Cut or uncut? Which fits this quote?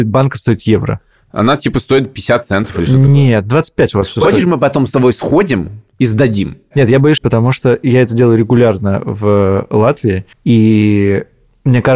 cut